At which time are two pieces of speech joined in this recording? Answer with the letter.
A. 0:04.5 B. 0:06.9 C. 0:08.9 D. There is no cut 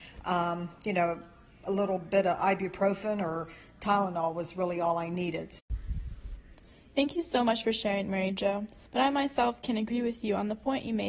C